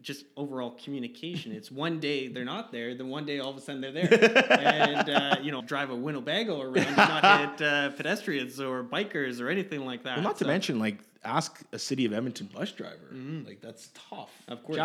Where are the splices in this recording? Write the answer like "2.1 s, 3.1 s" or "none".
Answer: 5.6 s

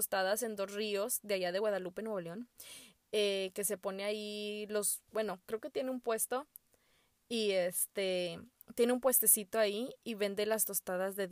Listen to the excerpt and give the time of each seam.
none

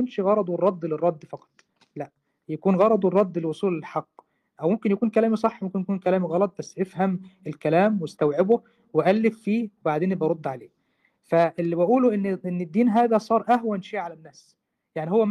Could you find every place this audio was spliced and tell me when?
none

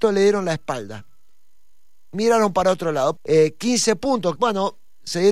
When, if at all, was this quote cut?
3.2 s, 4.4 s

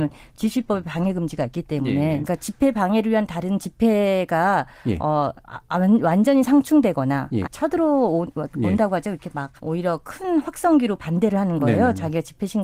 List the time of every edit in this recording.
2.2 s, 7.4 s, 9.6 s

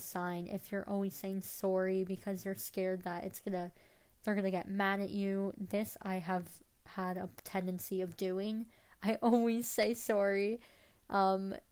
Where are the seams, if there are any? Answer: none

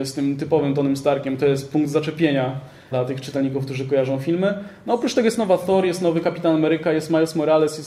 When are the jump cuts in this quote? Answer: 2.9 s

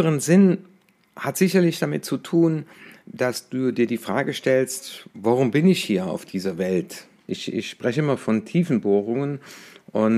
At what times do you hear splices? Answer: 7.3 s

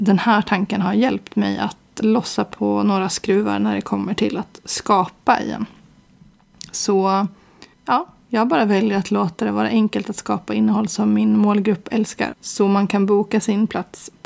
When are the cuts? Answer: 2.0 s, 7.7 s, 12.3 s

